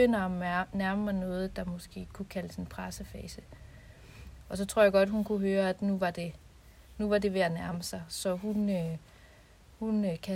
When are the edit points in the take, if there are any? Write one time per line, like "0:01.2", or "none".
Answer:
0:04.4